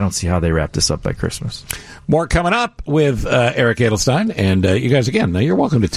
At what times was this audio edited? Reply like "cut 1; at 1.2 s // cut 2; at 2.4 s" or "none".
none